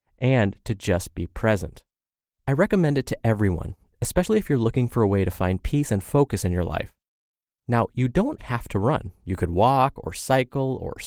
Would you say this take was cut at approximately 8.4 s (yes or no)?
yes